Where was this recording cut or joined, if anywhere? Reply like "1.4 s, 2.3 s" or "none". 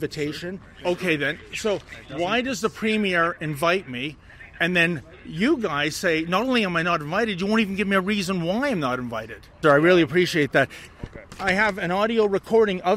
9.6 s, 10.9 s

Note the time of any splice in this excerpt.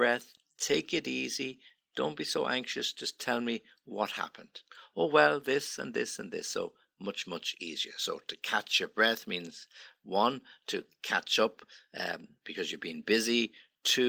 none

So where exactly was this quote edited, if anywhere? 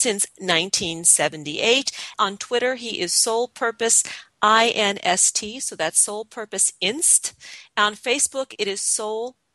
2.1 s

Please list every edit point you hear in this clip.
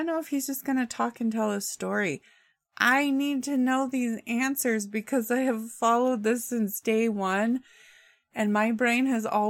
none

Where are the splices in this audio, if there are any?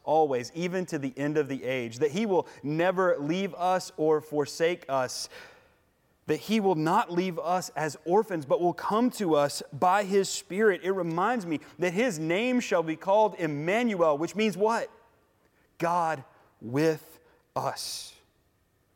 none

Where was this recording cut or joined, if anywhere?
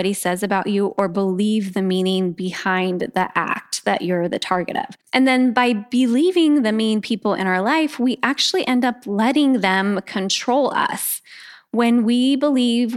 5.0 s

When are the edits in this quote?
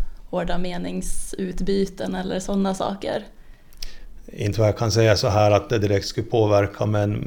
none

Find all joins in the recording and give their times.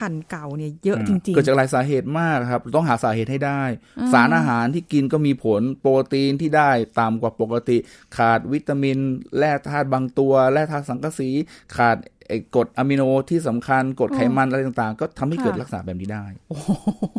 none

